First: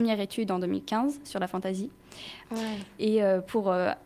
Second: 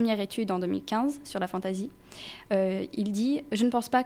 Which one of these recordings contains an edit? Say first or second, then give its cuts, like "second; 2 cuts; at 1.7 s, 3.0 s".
first; 1 cut; at 2.4 s